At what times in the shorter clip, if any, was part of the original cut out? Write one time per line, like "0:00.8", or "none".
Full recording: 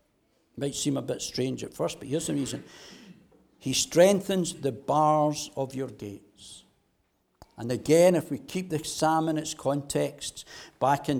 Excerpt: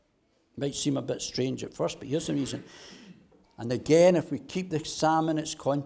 0:03.4